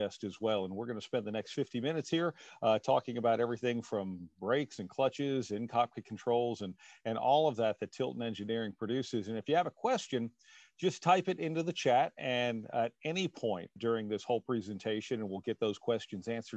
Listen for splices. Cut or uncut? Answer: cut